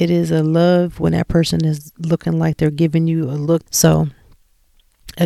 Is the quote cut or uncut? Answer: cut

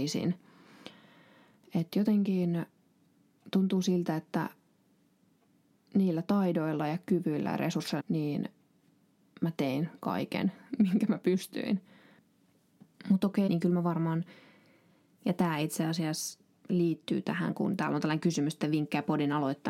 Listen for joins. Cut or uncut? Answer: cut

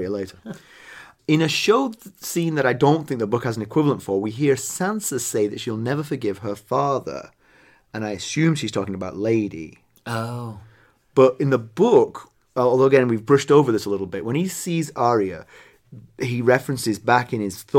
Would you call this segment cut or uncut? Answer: uncut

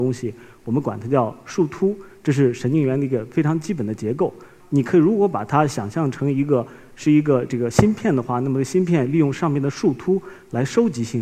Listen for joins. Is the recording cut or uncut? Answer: cut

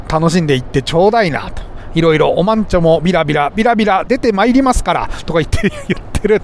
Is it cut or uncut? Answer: uncut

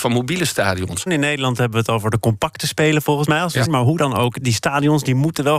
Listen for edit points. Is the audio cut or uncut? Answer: cut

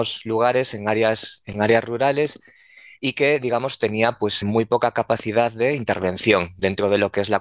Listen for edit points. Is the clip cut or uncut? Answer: cut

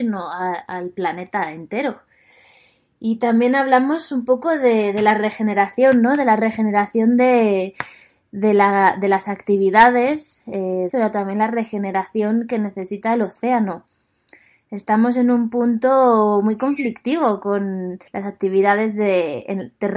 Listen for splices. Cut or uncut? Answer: cut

